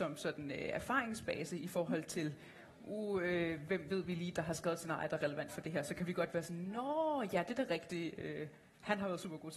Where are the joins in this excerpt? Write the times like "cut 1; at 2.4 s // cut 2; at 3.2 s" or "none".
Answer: none